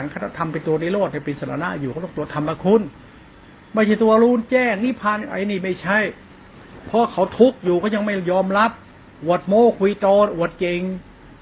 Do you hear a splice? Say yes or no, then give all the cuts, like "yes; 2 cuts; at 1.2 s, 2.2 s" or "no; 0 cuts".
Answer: no; 0 cuts